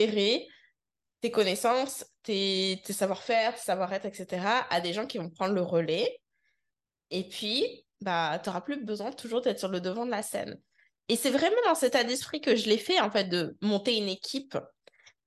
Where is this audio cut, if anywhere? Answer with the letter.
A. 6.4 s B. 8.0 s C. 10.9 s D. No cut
B